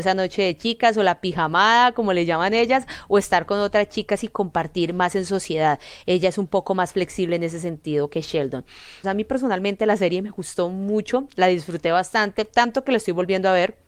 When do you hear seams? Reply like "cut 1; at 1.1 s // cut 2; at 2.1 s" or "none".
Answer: cut 1; at 9.0 s